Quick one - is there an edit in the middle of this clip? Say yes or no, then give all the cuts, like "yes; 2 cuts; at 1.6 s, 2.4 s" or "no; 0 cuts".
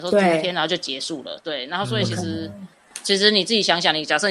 no; 0 cuts